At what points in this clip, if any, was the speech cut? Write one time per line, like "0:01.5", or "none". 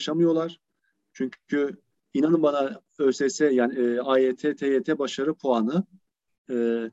none

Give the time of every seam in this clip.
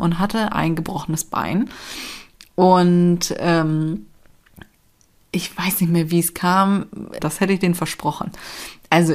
0:07.2

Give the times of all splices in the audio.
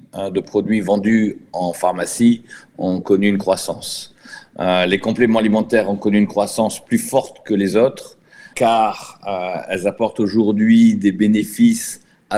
0:08.5

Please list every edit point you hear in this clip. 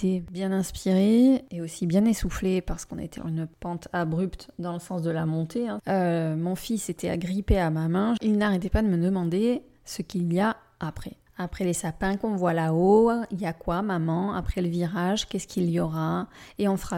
none

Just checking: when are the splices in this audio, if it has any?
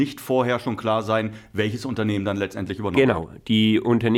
none

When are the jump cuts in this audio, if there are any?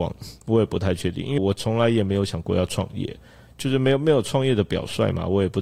0:01.4

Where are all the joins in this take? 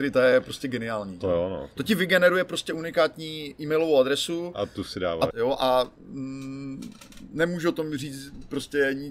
0:05.3

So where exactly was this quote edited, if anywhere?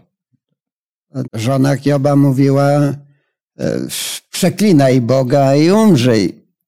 0:01.2

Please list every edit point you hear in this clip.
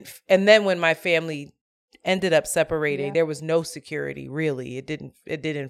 none

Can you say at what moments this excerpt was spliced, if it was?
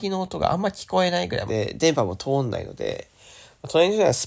0:01.5

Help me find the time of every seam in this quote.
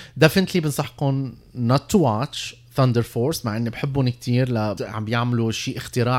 0:04.8

